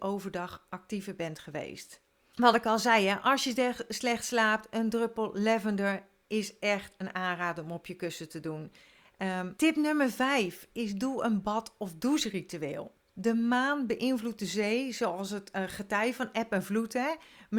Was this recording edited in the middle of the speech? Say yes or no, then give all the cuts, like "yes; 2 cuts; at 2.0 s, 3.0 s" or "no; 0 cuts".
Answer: yes; 3 cuts; at 2.3 s, 9.6 s, 13.1 s